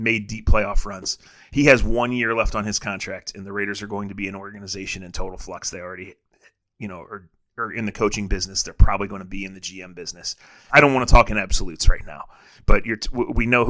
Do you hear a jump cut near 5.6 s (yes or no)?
no